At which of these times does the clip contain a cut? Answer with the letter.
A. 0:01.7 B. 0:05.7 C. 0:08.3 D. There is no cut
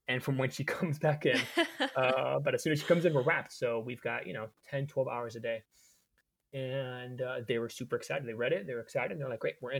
D